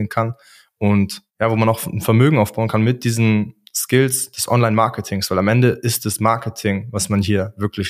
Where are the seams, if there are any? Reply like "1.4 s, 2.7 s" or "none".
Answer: 1.3 s